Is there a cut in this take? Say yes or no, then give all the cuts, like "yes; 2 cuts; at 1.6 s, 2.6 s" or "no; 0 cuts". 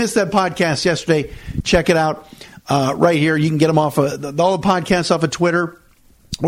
no; 0 cuts